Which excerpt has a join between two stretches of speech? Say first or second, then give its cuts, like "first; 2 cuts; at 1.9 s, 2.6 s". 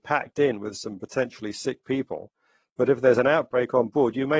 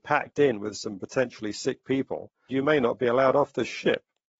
second; 1 cut; at 2.5 s